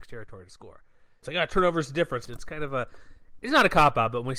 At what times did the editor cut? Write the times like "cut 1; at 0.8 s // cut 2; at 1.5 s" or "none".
cut 1; at 1.2 s // cut 2; at 2.3 s